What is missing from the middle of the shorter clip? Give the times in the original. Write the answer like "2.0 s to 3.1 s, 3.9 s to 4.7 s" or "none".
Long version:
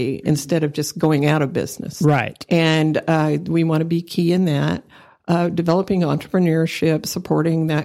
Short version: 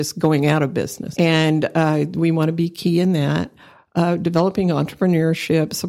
1.9 s to 2.5 s